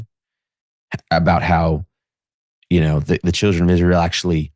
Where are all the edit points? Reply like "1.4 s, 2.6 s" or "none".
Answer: none